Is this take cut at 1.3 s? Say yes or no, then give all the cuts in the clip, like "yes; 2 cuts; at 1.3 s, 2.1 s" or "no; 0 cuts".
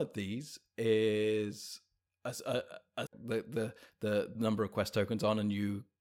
no; 2 cuts; at 3.1 s, 4.3 s